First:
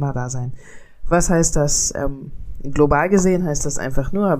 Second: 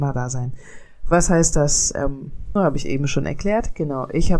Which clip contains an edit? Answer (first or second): second